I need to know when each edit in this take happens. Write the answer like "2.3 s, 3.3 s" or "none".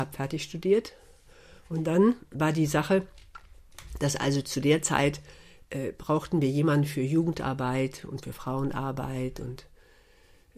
none